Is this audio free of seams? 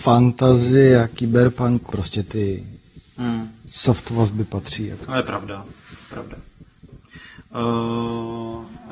no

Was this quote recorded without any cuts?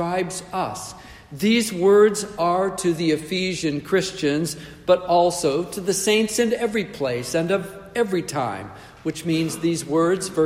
yes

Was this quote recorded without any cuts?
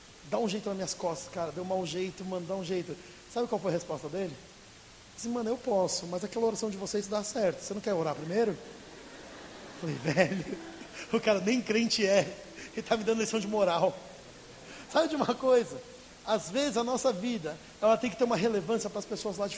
yes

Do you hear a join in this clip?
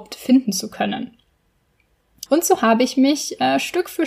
yes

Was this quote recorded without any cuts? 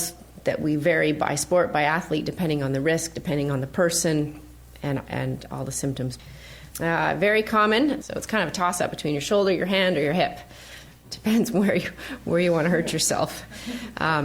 no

